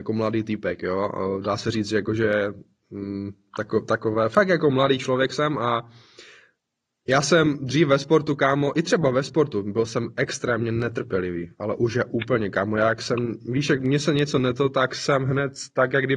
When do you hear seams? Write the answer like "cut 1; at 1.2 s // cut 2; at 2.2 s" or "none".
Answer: none